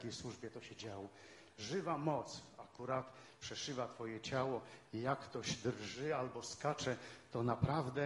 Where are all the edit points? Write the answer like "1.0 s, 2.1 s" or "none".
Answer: 1.5 s